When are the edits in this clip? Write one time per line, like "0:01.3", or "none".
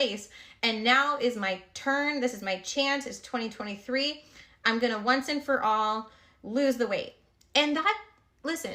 none